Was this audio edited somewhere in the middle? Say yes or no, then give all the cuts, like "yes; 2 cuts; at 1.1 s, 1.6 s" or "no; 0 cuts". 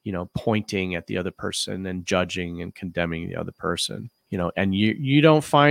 yes; 1 cut; at 4.2 s